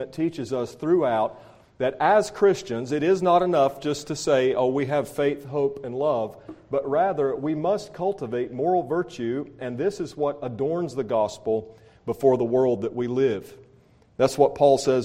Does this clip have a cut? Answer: no; 0 cuts

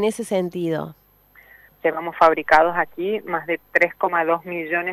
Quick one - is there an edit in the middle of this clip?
yes; 1 cut; at 1.7 s

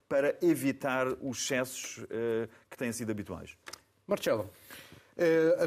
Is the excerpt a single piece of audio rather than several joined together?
yes; 0 cuts

